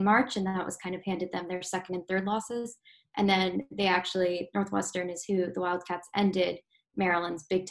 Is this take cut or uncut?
cut